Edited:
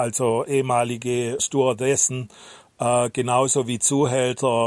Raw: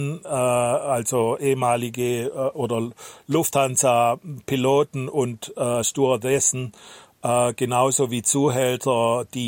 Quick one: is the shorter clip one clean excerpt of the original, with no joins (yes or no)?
no